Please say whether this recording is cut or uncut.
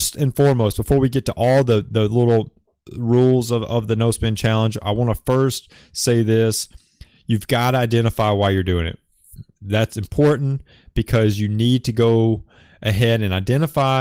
uncut